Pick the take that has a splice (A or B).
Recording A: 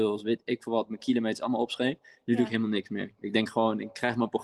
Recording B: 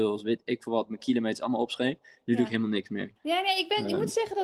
B